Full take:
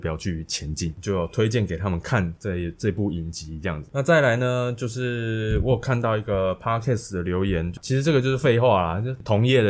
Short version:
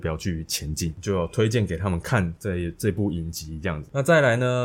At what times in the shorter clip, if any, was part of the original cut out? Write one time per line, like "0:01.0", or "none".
none